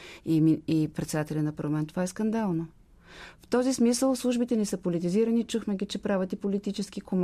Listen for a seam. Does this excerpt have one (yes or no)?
no